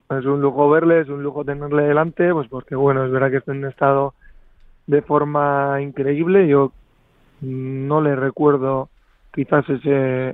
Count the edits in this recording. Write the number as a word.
zero